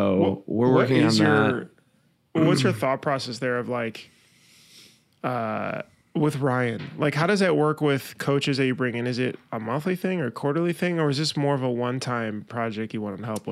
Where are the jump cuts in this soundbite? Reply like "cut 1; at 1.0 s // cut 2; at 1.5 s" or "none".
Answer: none